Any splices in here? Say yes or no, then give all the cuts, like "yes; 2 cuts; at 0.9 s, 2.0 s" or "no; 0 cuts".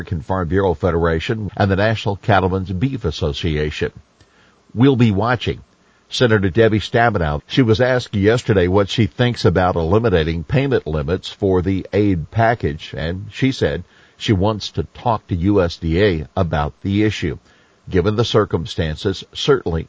yes; 2 cuts; at 1.5 s, 7.4 s